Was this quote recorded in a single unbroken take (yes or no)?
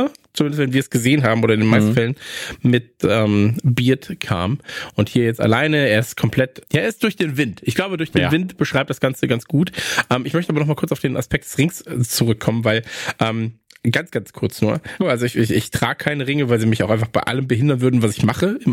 no